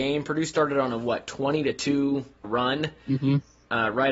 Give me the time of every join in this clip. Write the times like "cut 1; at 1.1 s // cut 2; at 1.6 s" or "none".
cut 1; at 2.4 s